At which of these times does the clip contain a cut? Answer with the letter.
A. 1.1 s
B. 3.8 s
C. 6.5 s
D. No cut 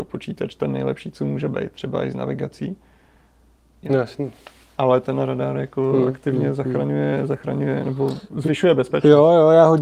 B